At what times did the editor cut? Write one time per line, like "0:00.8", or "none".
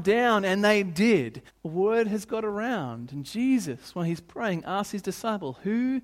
0:01.5